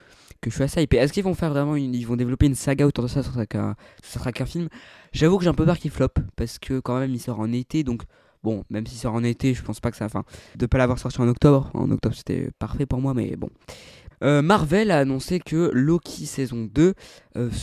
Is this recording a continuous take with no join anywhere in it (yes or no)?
no